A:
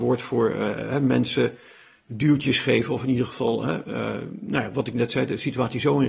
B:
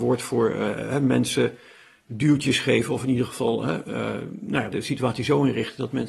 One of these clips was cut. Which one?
B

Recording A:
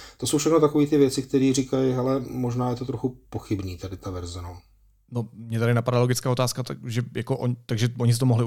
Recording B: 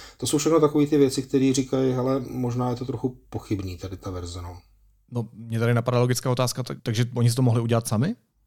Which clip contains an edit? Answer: B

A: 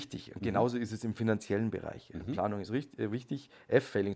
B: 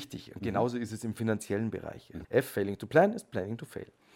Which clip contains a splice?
B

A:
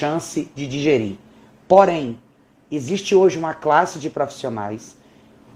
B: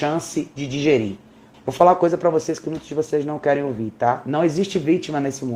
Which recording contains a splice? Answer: B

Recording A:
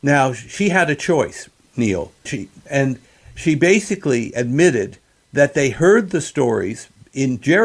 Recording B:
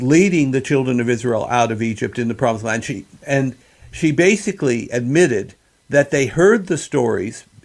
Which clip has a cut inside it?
A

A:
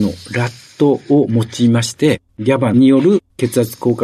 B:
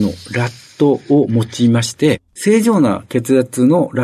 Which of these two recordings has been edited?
B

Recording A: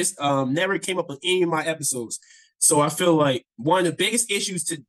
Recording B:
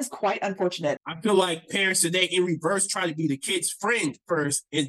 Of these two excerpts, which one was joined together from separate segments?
B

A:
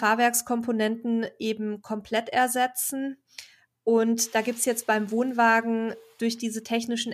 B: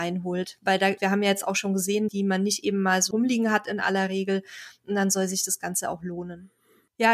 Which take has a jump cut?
B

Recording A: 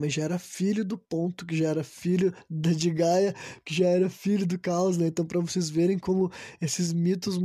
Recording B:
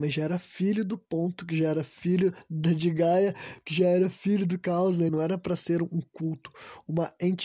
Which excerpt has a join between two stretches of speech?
B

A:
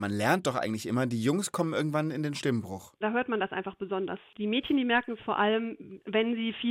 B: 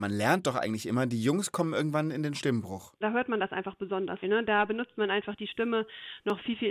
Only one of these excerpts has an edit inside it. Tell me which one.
B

